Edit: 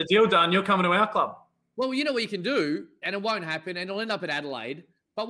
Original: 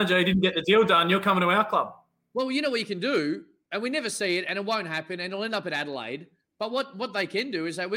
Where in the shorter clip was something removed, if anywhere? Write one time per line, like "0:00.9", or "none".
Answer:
0:03.0